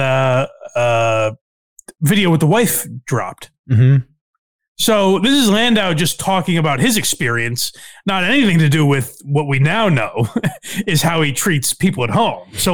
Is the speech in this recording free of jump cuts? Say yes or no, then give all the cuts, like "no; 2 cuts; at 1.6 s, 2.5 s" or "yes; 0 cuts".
yes; 0 cuts